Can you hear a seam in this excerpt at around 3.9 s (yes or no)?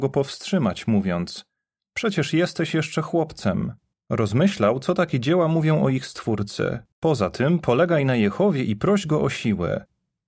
yes